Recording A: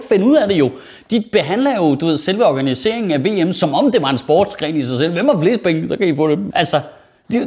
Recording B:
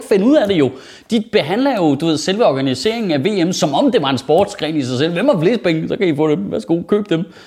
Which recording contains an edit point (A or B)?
A